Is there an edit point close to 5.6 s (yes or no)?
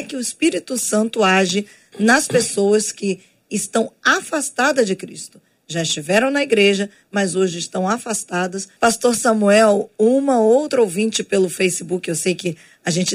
no